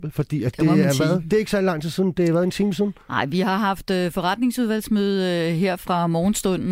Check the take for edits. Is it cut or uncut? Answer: uncut